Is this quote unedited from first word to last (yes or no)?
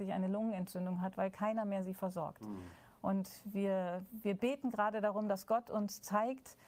yes